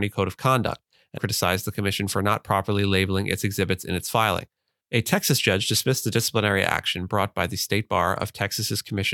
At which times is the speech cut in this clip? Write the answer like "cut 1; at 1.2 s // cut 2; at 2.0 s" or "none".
cut 1; at 1.2 s // cut 2; at 4.8 s